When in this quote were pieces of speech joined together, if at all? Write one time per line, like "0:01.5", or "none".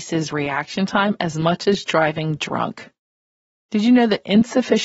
none